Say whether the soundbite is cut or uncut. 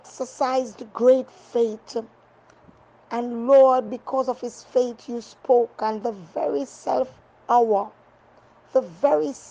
uncut